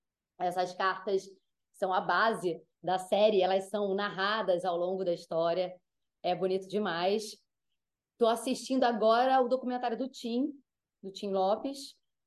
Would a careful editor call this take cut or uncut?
uncut